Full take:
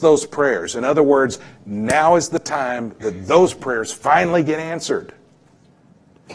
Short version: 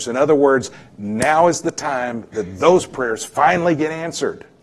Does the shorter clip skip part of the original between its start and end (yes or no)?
no